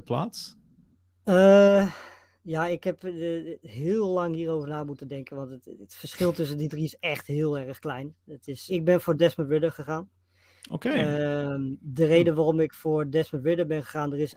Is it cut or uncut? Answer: cut